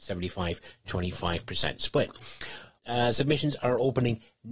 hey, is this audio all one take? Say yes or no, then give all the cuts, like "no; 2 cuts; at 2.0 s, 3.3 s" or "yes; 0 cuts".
no; 1 cut; at 2.8 s